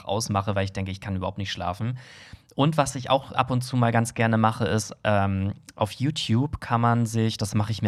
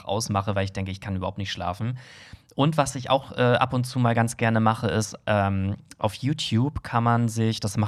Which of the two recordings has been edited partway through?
first; 1 cut; at 3.3 s

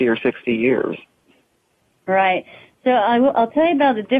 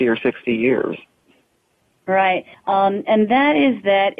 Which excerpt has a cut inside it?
second; 1 cut; at 2.5 s

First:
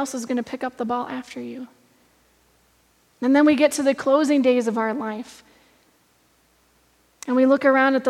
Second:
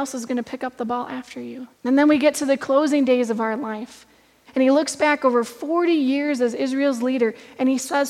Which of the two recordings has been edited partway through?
second; 2 cuts; at 1.7 s, 4.5 s

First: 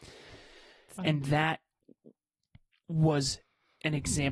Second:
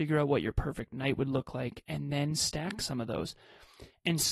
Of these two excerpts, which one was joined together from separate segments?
first; 1 cut; at 1.0 s

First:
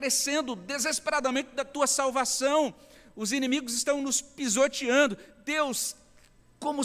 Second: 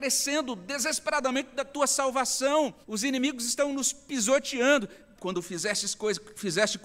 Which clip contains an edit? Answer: second; 2 cuts; at 2.8 s, 5.2 s

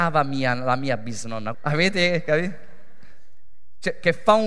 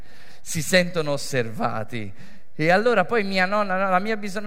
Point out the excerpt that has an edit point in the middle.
first; 1 cut; at 1.5 s

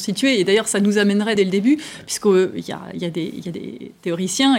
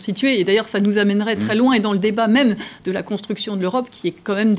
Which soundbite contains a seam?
first; 1 cut; at 1.4 s

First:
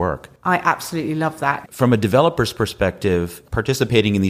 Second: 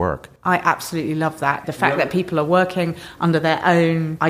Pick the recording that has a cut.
first; 1 cut; at 1.7 s

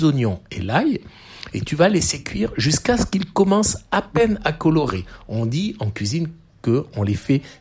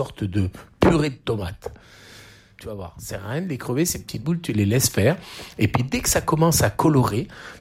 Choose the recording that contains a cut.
second; 1 cut; at 2.6 s

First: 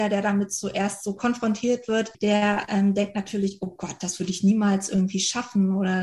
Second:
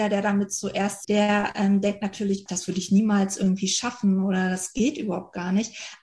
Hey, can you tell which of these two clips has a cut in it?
second; 2 cuts; at 1.0 s, 2.5 s

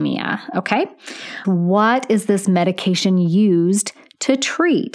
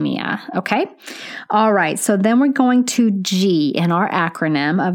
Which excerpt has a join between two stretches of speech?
first; 1 cut; at 1.4 s

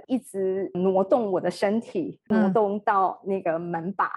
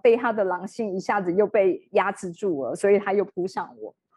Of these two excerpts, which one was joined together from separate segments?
first; 1 cut; at 2.3 s

